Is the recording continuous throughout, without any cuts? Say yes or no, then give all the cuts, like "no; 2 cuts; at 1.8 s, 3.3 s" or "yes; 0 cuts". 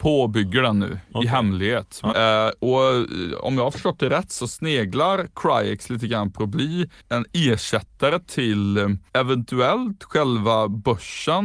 no; 3 cuts; at 2.1 s, 7.0 s, 9.1 s